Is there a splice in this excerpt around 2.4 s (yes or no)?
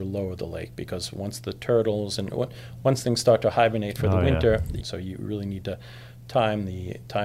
no